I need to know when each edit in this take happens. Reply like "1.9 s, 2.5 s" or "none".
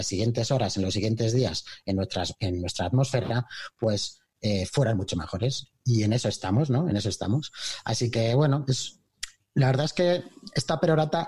none